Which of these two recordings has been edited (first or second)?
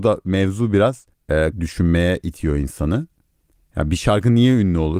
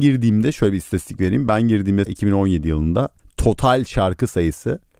first